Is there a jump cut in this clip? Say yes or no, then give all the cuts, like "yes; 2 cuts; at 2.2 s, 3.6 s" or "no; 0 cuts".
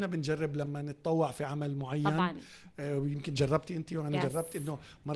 no; 0 cuts